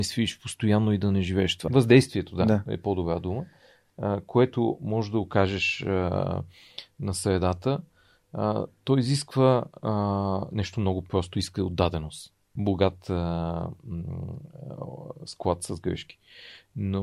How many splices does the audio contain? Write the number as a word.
two